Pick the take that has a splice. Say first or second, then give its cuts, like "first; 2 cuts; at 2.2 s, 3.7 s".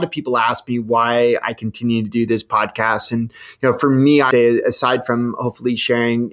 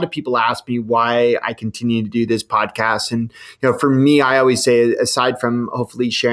first; 1 cut; at 4.3 s